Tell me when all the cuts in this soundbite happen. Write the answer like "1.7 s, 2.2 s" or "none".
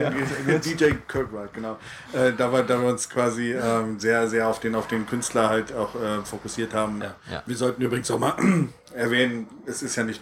7.0 s